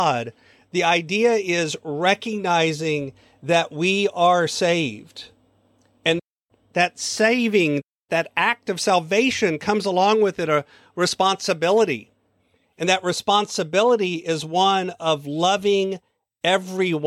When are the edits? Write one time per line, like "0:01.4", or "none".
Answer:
none